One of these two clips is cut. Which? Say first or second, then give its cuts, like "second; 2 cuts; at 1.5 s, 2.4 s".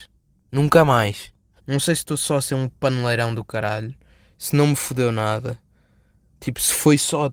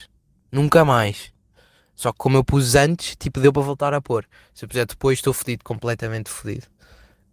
first; 1 cut; at 1.6 s